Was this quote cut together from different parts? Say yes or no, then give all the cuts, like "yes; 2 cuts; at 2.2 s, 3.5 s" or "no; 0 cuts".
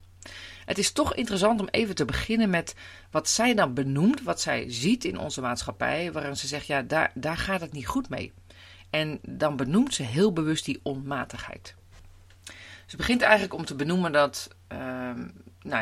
no; 0 cuts